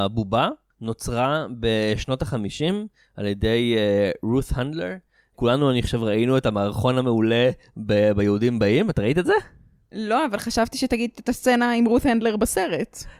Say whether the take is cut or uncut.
uncut